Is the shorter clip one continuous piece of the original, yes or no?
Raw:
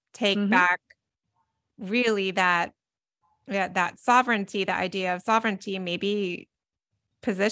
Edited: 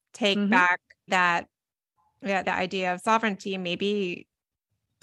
no